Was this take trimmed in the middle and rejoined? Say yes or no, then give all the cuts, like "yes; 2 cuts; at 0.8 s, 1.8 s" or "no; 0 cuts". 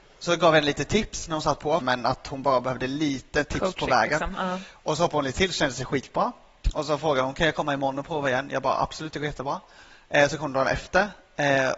yes; 1 cut; at 1.8 s